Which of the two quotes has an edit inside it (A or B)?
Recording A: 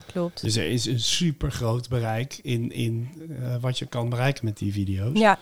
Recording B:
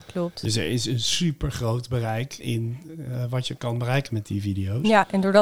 B